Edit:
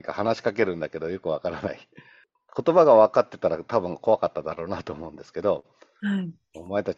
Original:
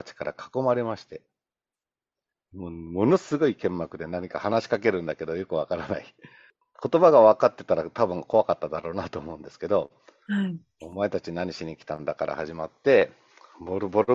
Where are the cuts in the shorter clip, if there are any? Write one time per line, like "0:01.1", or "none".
none